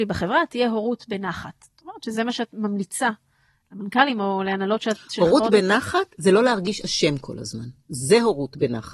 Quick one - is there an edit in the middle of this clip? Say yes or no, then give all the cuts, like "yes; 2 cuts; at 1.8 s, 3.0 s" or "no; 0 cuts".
no; 0 cuts